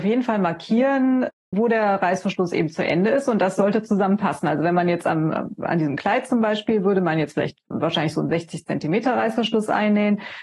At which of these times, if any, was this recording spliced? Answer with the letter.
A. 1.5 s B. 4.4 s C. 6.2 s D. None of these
A